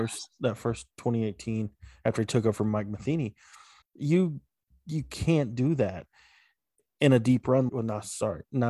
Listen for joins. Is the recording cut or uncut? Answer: cut